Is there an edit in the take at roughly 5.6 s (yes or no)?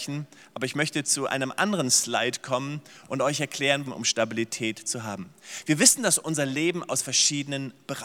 no